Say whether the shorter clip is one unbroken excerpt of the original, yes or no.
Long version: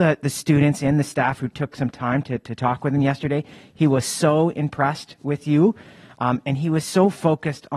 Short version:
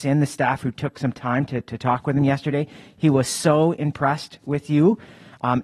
yes